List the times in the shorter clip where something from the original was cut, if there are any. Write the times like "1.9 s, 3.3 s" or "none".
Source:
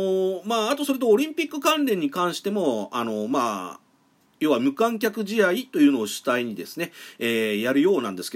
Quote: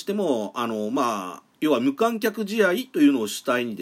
1.5 s